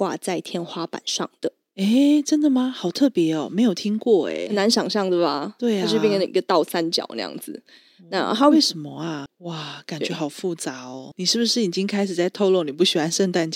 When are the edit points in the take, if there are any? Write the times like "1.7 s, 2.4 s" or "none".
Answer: 9.3 s, 11.1 s